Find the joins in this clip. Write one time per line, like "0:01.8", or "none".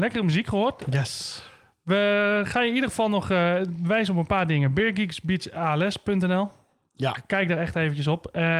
none

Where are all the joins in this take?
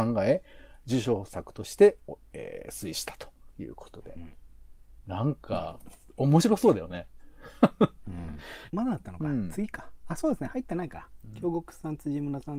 0:03.5
0:08.7

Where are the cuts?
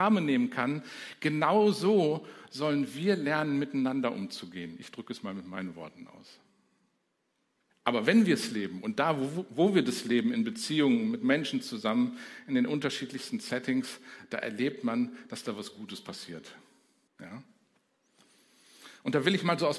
0:07.7
0:17.1

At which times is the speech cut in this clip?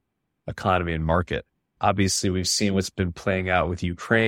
0:01.8

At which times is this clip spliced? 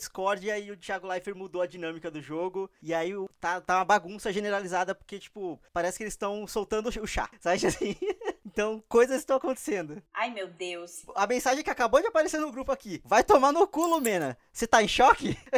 none

